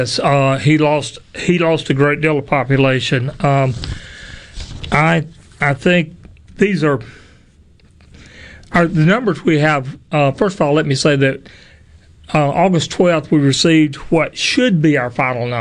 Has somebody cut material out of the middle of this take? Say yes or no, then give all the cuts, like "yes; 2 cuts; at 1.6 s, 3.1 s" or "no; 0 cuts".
no; 0 cuts